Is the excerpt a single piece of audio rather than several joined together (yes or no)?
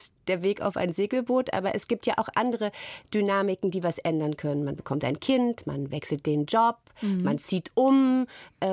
yes